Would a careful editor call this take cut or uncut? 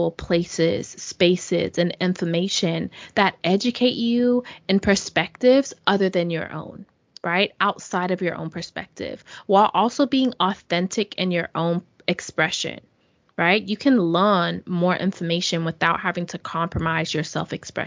uncut